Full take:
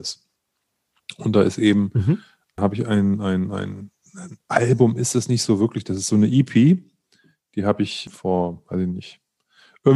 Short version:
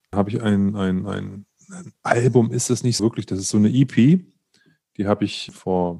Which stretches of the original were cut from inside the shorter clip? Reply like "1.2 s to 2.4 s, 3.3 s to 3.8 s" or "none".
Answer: 5.4 s to 5.6 s

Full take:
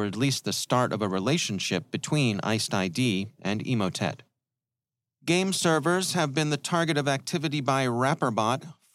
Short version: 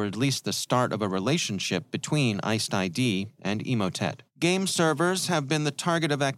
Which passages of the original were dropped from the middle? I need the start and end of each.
4.3 s to 5.1 s

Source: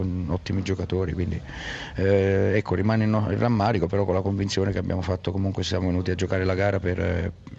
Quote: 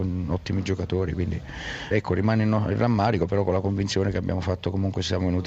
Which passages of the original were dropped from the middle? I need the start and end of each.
1.9 s to 2.5 s

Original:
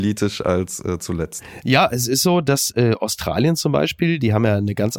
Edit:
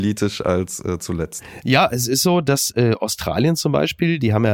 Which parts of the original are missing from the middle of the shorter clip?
none

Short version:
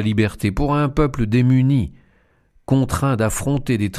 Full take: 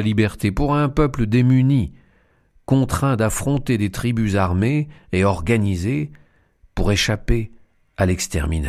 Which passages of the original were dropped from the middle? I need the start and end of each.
none

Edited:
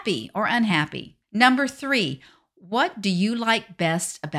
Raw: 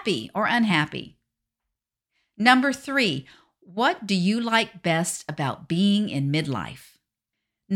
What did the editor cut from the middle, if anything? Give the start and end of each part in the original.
1.2 s to 2.3 s

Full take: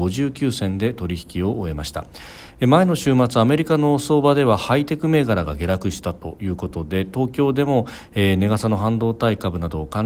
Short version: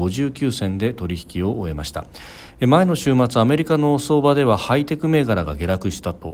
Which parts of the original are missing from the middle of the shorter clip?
none

